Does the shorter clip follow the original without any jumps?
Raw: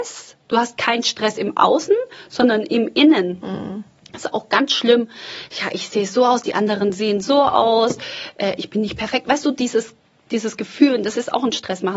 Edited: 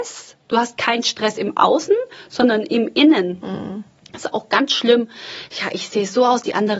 yes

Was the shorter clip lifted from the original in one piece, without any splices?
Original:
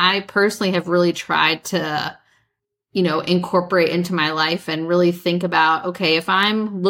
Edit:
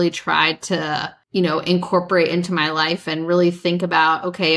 no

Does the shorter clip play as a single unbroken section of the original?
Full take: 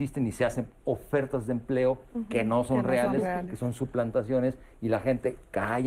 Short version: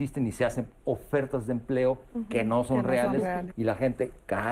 no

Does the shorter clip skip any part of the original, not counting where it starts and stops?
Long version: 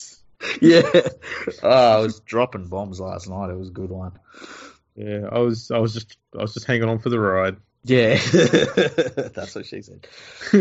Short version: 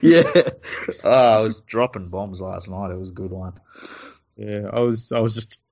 no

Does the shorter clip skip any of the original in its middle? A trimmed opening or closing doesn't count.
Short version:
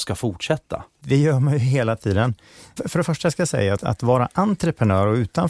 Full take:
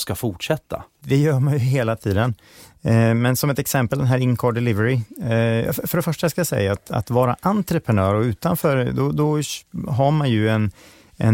yes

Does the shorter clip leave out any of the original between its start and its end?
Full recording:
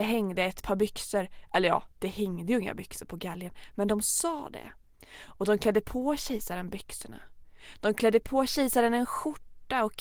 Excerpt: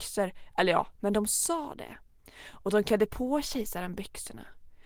yes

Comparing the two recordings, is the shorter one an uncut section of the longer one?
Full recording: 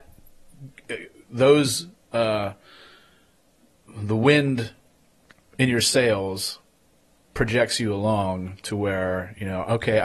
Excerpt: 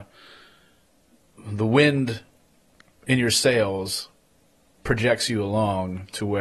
yes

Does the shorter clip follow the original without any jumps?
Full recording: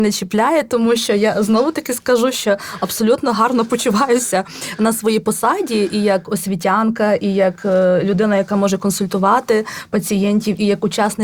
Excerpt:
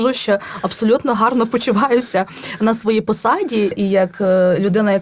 no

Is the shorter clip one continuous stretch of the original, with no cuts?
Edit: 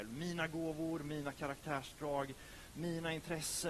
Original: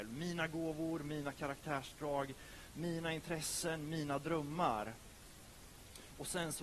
yes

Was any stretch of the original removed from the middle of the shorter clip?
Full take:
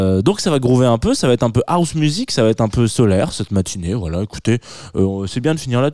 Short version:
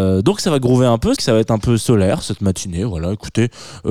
yes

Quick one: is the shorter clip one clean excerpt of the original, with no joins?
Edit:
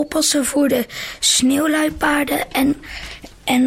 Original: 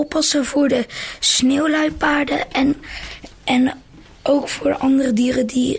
yes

